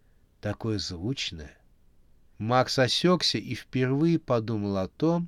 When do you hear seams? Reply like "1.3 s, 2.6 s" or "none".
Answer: 2.3 s